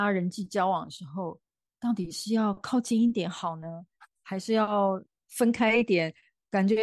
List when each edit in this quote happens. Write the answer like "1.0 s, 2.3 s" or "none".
none